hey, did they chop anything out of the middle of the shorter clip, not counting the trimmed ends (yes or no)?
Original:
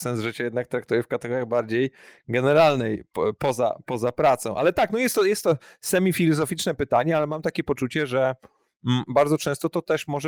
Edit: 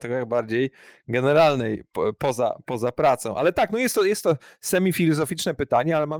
no